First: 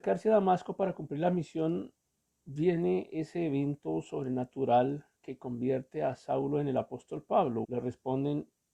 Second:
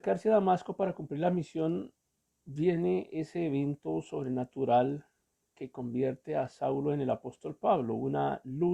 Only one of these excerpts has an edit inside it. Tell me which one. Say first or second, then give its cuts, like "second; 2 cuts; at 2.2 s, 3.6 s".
first; 2 cuts; at 5.1 s, 7.6 s